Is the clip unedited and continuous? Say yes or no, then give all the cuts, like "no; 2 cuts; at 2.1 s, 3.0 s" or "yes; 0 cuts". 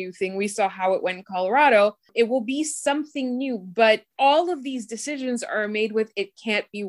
yes; 0 cuts